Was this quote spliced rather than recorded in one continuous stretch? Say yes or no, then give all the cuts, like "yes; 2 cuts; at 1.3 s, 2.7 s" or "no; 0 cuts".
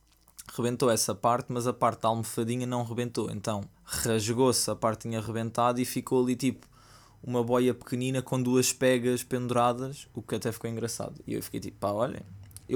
yes; 1 cut; at 3.7 s